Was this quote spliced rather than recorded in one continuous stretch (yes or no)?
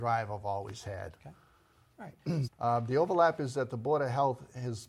yes